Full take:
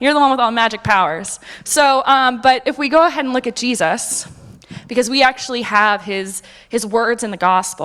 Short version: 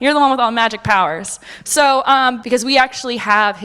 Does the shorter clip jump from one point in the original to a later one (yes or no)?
yes